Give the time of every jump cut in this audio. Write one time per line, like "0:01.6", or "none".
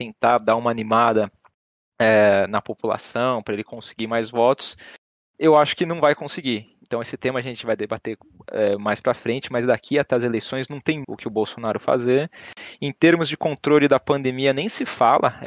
0:11.0